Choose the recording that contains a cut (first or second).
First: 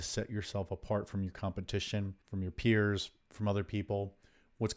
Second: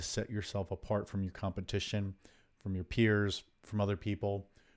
first